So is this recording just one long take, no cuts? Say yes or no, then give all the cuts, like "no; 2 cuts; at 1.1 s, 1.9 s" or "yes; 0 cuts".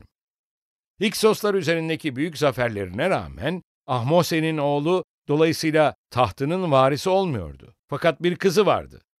no; 1 cut; at 7.8 s